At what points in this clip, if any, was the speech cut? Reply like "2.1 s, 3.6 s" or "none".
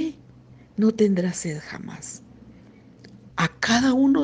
3.3 s